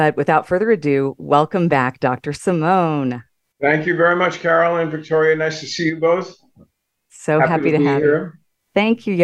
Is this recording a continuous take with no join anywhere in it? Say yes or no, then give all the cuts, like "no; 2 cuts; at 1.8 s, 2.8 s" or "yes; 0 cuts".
yes; 0 cuts